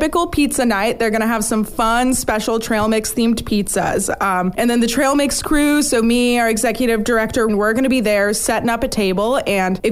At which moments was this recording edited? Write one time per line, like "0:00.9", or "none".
0:07.5